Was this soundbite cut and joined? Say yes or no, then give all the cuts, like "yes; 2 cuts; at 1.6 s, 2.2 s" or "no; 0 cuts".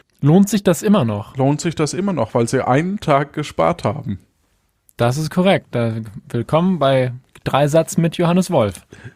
no; 0 cuts